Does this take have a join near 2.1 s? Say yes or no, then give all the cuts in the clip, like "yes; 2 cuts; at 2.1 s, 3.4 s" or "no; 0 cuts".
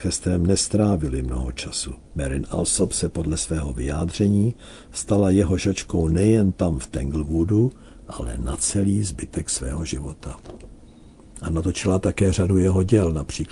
yes; 1 cut; at 2.1 s